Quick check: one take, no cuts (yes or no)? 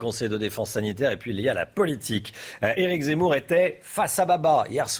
yes